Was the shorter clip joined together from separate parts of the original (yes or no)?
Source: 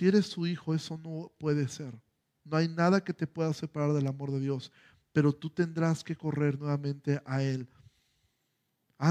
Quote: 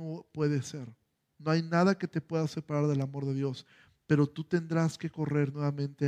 no